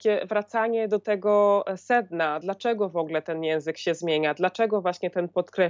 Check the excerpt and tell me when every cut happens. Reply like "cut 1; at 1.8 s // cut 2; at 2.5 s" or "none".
none